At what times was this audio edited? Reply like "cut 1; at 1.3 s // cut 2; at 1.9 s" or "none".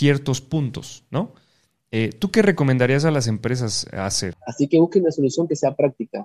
cut 1; at 4.3 s